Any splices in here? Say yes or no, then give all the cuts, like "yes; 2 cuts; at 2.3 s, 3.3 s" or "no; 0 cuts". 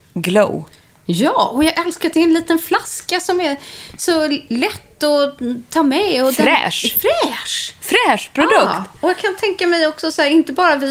no; 0 cuts